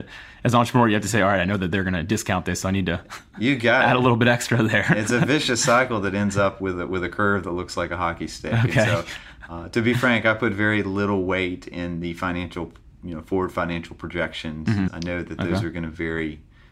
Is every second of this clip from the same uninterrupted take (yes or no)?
no